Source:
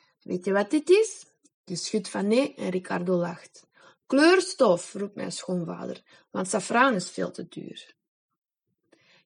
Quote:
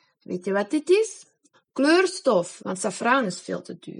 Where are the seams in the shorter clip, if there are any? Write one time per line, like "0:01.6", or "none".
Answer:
0:01.5
0:02.6